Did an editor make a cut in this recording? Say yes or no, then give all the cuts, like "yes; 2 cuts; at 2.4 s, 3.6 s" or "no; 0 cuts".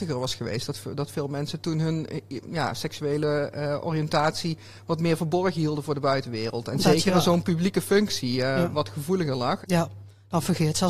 yes; 1 cut; at 9.6 s